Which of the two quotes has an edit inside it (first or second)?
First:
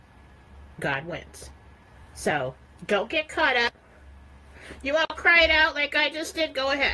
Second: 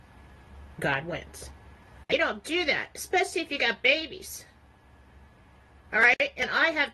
second